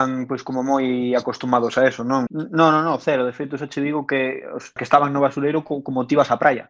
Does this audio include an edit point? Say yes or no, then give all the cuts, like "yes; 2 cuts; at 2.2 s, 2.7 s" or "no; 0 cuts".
yes; 2 cuts; at 2.3 s, 4.8 s